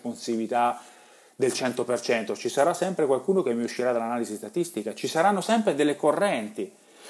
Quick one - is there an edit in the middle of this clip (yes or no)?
no